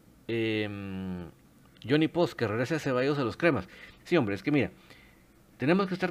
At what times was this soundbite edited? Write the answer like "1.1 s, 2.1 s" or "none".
4.0 s